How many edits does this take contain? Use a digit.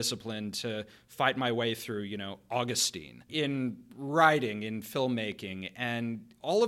1